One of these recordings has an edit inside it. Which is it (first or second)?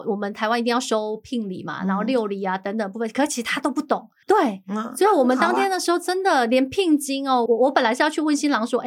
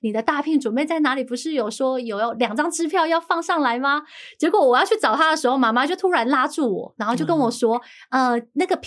first